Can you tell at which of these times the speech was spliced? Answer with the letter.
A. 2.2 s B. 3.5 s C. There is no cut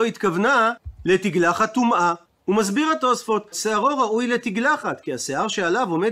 B